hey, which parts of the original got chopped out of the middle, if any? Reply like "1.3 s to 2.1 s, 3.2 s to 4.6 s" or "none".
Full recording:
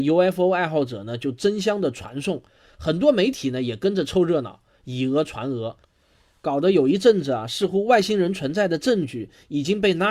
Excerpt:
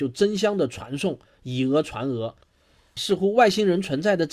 2.5 s to 4.7 s, 6.4 s to 7.5 s